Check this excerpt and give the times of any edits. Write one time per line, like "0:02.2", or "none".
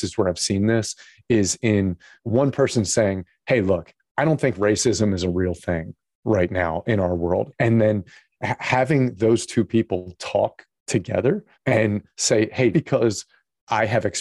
0:07.5
0:11.5
0:12.7